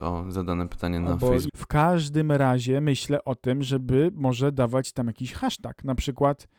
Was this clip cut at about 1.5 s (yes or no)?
yes